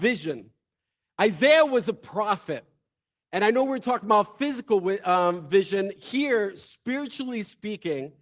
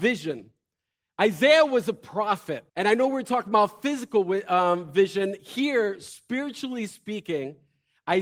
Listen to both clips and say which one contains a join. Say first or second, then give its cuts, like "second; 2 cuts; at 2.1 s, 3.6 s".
second; 1 cut; at 2.7 s